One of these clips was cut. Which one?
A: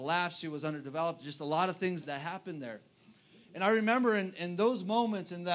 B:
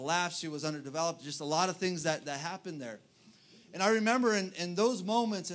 A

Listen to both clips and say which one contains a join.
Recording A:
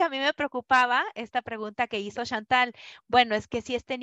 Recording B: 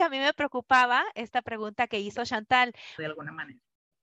B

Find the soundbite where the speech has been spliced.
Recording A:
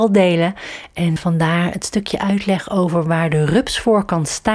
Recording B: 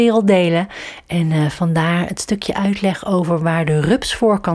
A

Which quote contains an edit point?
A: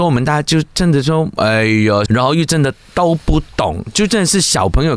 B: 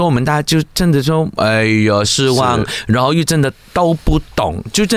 A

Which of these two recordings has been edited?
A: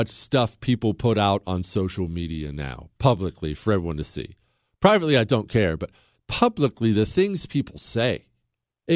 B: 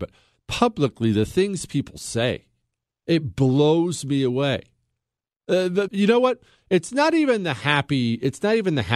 B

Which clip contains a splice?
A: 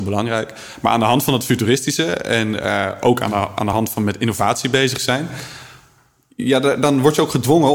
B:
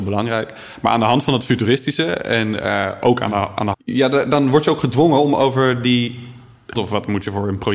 B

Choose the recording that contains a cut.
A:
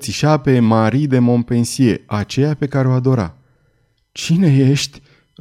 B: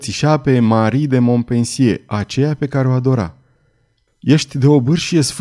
B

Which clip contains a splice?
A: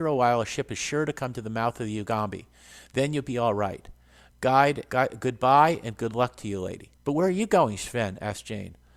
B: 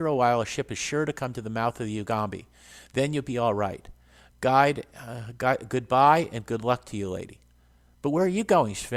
A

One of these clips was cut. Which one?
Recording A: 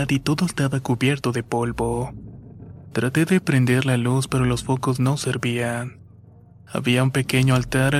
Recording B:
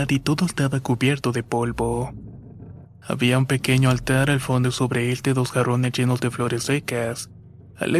B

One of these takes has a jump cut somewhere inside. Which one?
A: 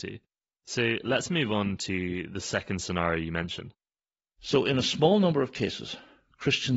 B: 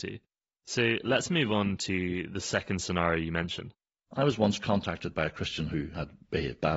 B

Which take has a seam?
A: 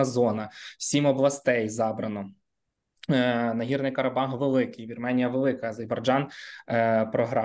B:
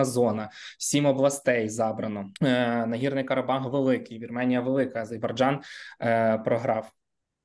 B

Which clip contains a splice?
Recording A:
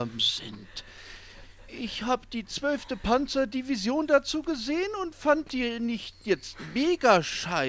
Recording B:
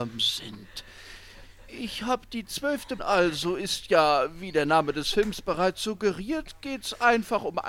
B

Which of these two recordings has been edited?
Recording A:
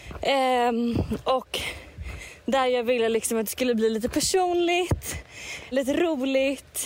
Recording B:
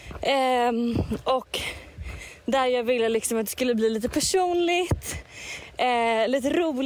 A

